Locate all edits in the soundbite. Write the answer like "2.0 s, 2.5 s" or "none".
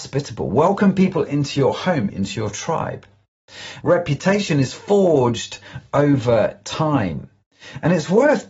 2.1 s, 3.8 s